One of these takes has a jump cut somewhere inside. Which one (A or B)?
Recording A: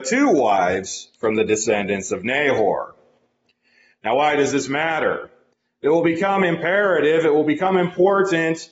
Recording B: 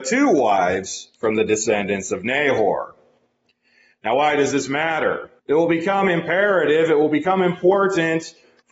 B